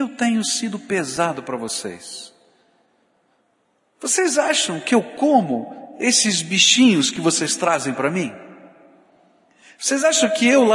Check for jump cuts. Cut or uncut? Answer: uncut